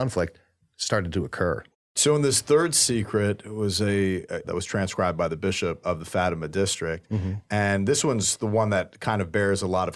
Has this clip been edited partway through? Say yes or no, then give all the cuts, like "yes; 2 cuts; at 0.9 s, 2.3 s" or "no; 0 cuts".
yes; 2 cuts; at 4.4 s, 5.8 s